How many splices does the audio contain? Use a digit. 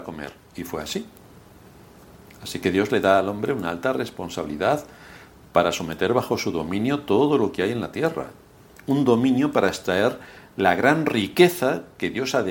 0